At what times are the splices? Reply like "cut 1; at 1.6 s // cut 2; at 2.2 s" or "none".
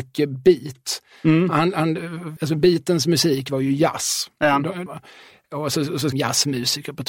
cut 1; at 2.4 s // cut 2; at 4.9 s // cut 3; at 6.1 s